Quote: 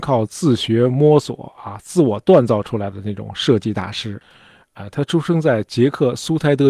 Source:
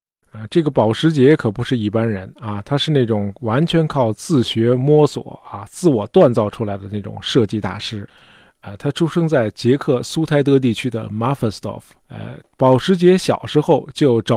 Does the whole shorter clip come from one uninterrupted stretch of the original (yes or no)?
yes